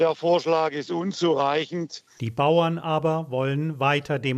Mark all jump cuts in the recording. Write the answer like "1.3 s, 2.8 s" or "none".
2.2 s